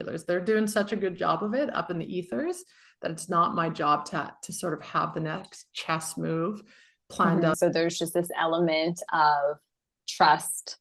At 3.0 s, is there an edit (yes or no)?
no